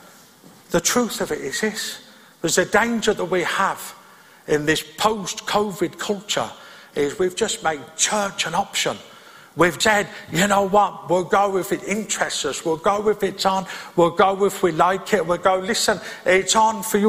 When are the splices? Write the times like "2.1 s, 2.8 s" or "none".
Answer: 9.8 s